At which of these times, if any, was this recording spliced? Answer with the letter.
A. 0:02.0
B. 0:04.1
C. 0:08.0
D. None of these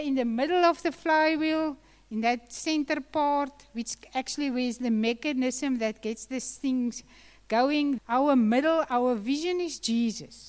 C